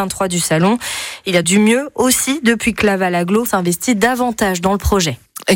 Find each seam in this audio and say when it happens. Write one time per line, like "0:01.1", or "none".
0:01.4
0:03.5